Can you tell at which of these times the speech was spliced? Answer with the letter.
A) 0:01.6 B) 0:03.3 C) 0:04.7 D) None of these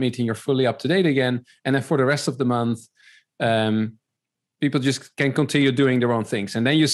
D